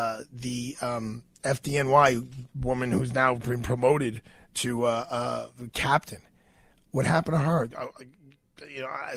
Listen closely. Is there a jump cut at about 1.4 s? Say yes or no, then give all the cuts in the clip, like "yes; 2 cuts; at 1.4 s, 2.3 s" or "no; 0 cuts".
no; 1 cut; at 7.7 s